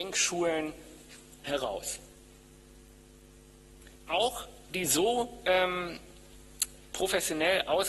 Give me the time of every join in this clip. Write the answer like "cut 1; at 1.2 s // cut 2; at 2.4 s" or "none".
cut 1; at 4.0 s // cut 2; at 6.9 s